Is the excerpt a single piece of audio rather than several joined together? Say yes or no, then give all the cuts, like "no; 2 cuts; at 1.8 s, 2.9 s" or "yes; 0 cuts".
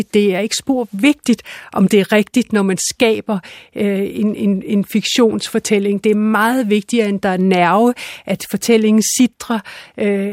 yes; 0 cuts